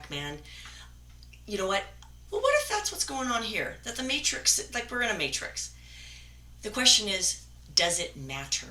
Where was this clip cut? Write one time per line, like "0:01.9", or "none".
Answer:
0:02.3